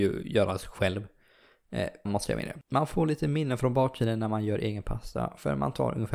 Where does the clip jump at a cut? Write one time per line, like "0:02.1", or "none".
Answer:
0:02.1

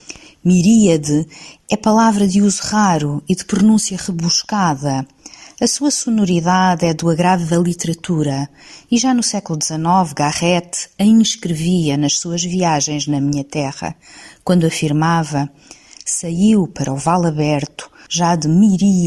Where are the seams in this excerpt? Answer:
0:18.1

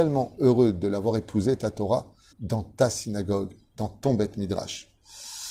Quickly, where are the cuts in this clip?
0:02.3

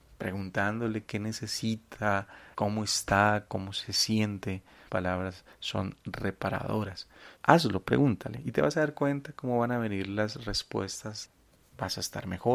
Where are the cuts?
0:02.5
0:07.4

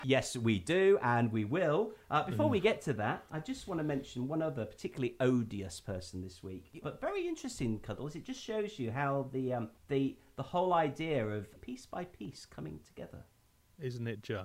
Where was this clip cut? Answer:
0:06.8
0:09.8
0:11.6

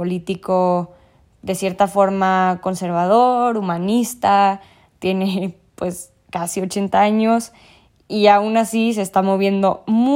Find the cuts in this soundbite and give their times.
none

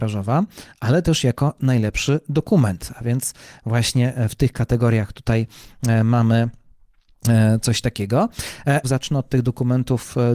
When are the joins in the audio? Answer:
0:08.8

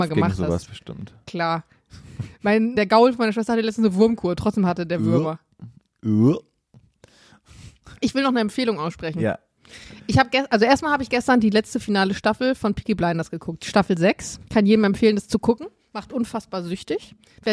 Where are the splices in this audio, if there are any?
0:02.7
0:14.5

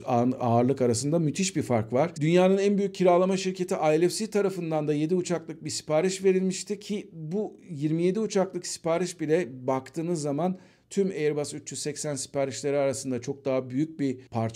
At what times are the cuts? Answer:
0:02.1

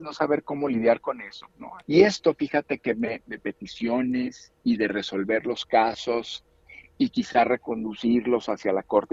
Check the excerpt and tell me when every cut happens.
0:01.8
0:03.2
0:04.6

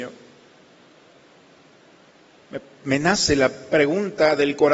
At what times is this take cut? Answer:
0:02.4

